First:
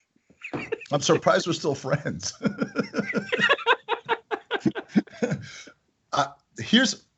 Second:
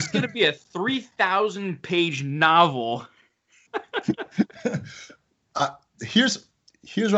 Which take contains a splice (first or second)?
second